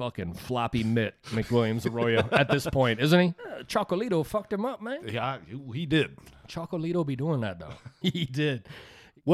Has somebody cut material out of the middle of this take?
yes; 2 cuts; at 3.4 s, 8.0 s

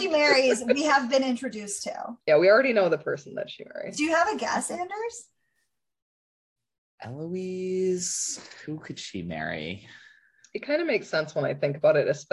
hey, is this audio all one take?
yes; 0 cuts

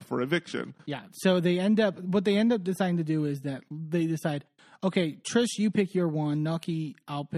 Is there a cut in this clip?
no; 0 cuts

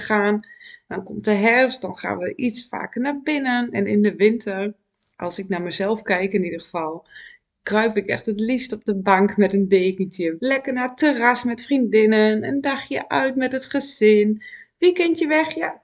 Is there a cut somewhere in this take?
yes; 1 cut; at 10.4 s

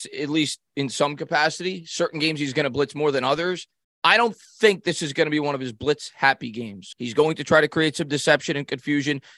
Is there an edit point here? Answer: yes; 1 cut; at 6.9 s

